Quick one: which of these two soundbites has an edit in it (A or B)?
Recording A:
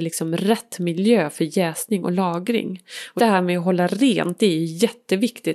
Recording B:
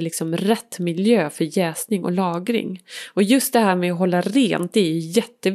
A